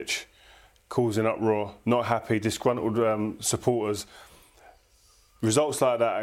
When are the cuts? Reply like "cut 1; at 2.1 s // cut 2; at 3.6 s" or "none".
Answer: none